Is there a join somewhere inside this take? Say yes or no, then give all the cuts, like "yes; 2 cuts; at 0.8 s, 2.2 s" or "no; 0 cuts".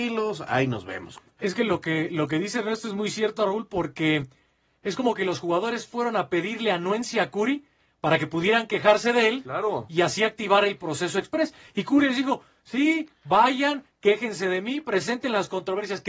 yes; 1 cut; at 1.4 s